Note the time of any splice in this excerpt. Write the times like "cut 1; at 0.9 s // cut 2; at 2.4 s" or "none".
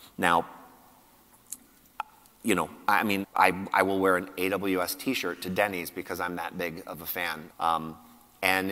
cut 1; at 3.2 s // cut 2; at 7.5 s